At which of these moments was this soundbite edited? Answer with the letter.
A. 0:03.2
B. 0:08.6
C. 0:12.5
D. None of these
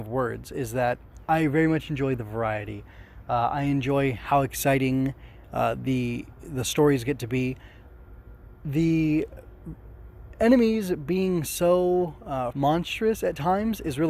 C